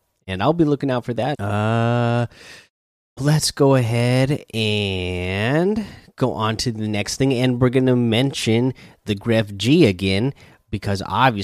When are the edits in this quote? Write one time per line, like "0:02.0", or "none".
0:01.3
0:03.2